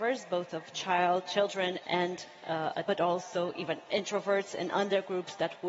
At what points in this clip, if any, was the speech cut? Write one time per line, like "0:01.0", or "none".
0:01.3
0:02.9